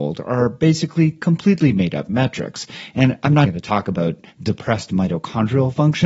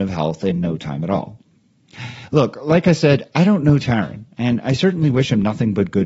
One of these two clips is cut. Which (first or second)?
first